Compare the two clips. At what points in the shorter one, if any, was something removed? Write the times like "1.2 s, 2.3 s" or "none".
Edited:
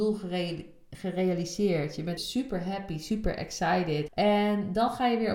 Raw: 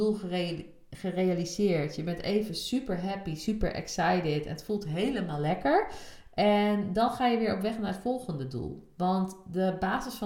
2.2 s, 4.1 s